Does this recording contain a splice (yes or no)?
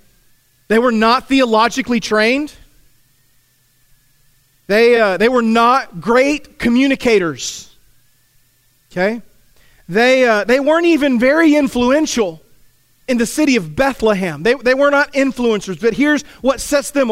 no